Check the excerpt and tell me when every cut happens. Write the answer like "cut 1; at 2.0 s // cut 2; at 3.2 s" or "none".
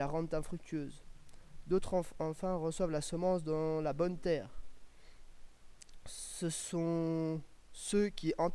none